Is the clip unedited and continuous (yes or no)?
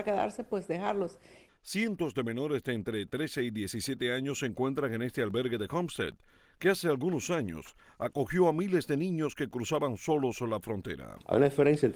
no